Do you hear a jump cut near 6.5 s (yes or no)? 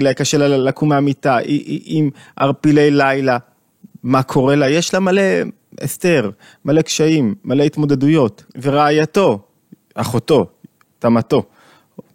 no